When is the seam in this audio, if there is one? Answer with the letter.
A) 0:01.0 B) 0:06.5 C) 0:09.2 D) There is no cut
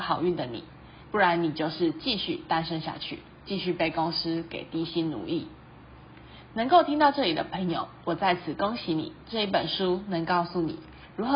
A